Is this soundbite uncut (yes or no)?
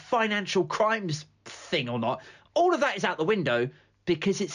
yes